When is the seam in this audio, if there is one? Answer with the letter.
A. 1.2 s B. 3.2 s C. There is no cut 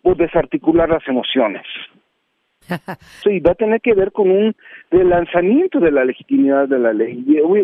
B